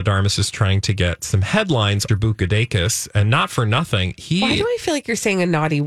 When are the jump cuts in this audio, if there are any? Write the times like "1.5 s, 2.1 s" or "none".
2.1 s